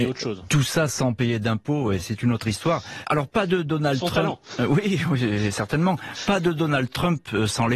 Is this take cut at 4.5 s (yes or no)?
no